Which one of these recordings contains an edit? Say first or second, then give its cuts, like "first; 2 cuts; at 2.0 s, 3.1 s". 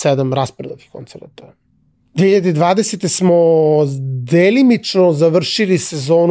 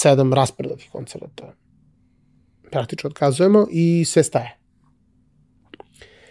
first; 1 cut; at 2.0 s